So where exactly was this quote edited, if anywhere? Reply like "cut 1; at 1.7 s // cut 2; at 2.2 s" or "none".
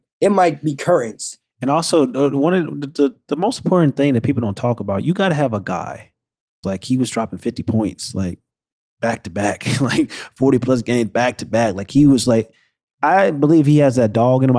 cut 1; at 6.6 s